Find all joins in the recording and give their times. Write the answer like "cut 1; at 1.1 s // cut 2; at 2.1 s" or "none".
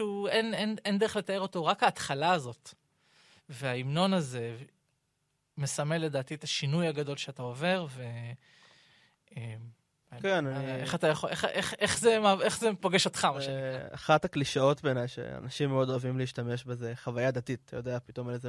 none